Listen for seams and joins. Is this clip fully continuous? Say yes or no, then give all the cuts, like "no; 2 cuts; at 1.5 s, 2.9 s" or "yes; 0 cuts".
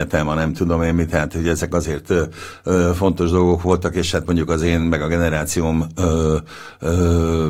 yes; 0 cuts